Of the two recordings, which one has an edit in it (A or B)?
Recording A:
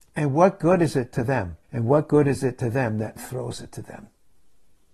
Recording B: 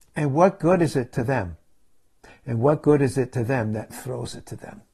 A